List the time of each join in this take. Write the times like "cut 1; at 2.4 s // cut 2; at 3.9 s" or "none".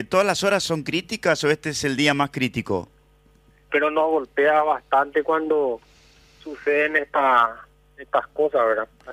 cut 1; at 3.7 s